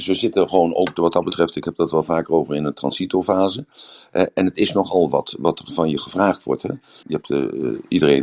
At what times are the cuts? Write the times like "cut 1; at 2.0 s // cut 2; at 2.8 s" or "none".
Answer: cut 1; at 7.0 s

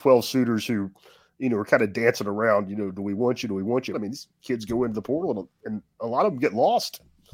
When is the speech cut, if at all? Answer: cut 1; at 3.9 s

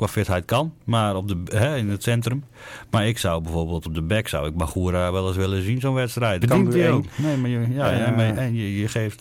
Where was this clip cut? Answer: cut 1; at 6.4 s

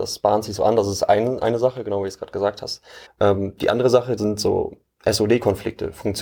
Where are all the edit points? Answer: cut 1; at 3.1 s // cut 2; at 4.2 s

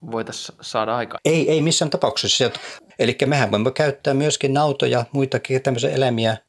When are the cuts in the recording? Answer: cut 1; at 2.9 s

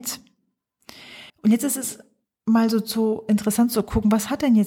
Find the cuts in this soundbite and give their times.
cut 1; at 1.3 s

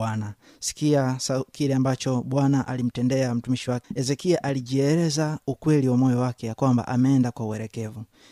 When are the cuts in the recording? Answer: cut 1; at 3.8 s

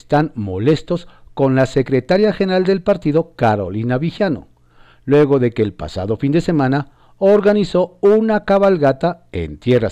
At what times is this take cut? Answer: none

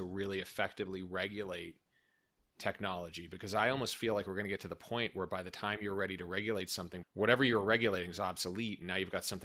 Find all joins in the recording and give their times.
cut 1; at 7.0 s

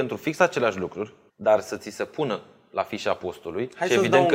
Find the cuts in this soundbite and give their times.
cut 1; at 1.3 s

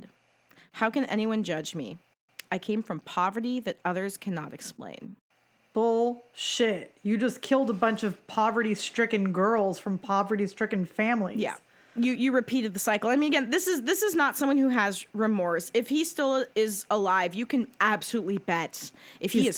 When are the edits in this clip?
cut 1; at 12.2 s

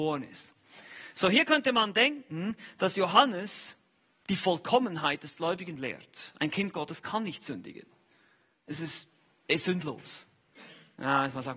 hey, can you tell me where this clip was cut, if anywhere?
none

